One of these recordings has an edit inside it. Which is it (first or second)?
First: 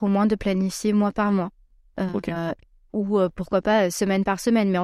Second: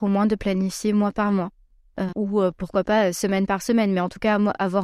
second